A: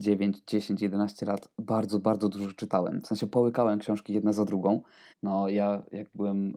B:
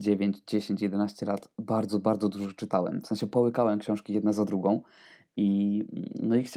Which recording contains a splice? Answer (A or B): A